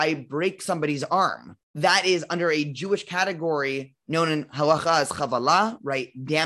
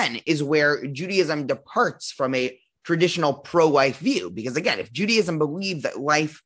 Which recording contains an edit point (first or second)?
first